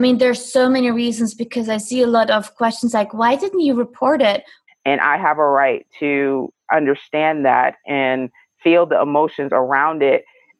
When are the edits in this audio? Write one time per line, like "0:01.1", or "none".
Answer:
0:04.7